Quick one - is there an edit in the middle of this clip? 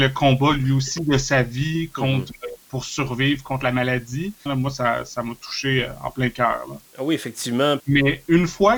yes; 2 cuts; at 4.5 s, 7.8 s

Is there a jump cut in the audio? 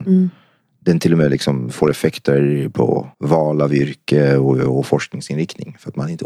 yes; 1 cut; at 3.1 s

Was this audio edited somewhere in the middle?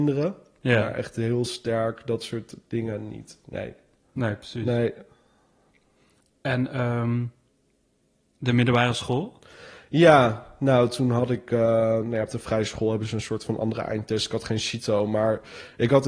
no; 0 cuts

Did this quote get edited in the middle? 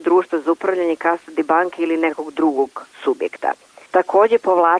yes; 1 cut; at 3.9 s

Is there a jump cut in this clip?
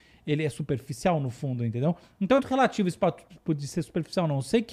yes; 1 cut; at 2.4 s

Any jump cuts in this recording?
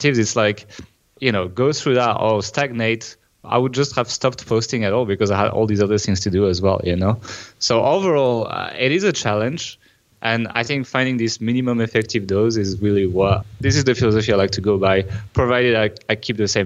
no; 0 cuts

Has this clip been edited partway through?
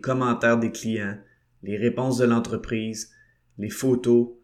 no; 0 cuts

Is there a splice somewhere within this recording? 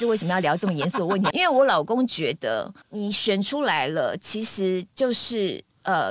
yes; 1 cut; at 1.3 s

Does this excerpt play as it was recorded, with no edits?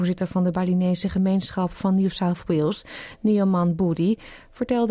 yes; 0 cuts

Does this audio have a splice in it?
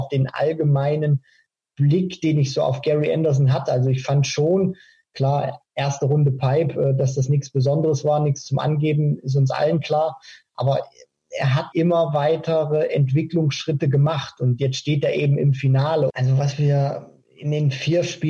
yes; 2 cuts; at 11.7 s, 16.1 s

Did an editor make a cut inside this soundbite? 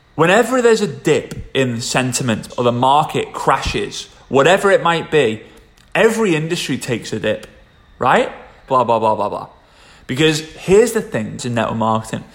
yes; 3 cuts; at 2.5 s, 8.7 s, 11.4 s

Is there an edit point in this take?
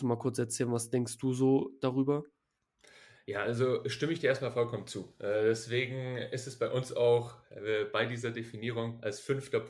no; 0 cuts

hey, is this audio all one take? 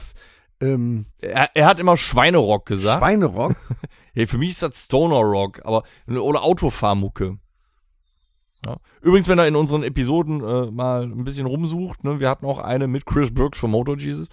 yes; 0 cuts

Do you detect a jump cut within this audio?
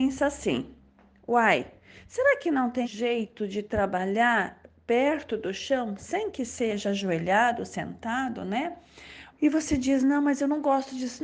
yes; 2 cuts; at 2.8 s, 9.3 s

